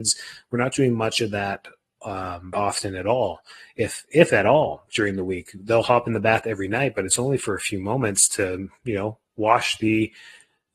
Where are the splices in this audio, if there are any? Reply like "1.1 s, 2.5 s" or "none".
2.5 s